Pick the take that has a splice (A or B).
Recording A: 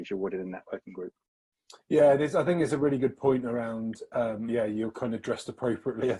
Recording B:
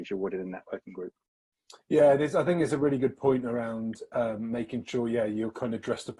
A